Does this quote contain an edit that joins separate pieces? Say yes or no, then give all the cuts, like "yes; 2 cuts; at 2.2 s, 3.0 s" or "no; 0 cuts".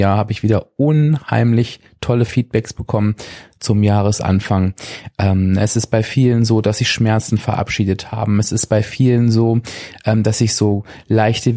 no; 0 cuts